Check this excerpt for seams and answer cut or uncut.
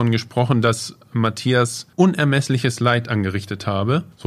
cut